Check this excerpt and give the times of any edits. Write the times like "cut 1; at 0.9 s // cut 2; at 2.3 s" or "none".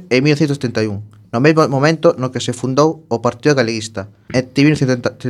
cut 1; at 4.3 s